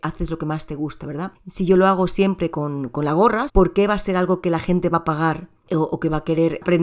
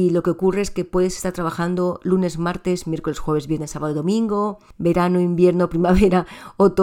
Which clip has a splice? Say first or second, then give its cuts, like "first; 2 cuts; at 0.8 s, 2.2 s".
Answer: first; 2 cuts; at 1.3 s, 3.5 s